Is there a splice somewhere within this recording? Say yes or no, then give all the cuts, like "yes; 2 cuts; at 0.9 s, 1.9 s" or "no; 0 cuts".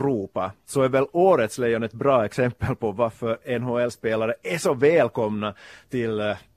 no; 0 cuts